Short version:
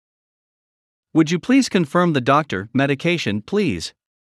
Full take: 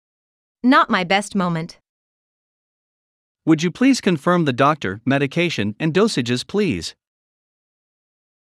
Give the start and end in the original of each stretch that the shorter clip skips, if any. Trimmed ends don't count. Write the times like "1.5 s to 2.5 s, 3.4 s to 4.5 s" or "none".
5.8 s to 6.5 s